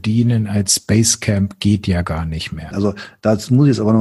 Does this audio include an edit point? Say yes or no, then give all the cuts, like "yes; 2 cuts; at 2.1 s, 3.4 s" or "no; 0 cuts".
yes; 1 cut; at 2.7 s